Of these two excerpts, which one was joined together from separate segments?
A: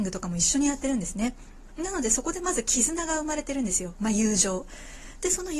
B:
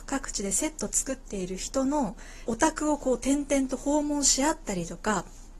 B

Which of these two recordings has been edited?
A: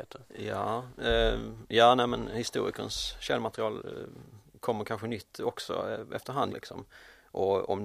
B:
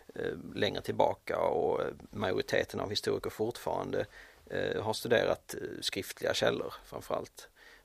A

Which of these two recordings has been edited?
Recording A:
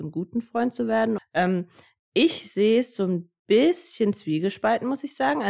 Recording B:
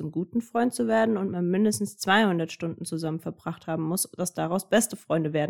A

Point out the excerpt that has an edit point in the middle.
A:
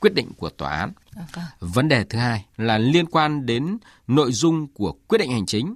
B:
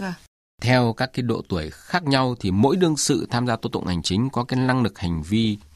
A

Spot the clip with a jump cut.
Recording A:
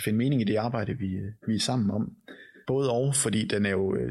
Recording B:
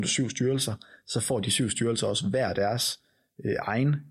A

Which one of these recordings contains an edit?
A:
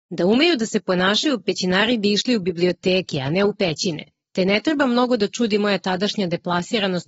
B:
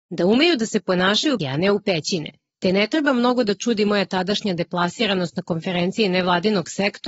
B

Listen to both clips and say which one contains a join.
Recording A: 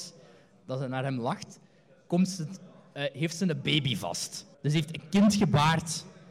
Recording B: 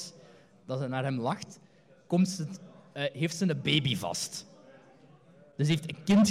A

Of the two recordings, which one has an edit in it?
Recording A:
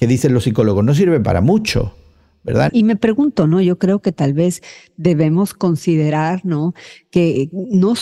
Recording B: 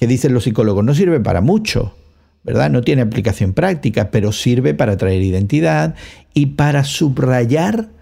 A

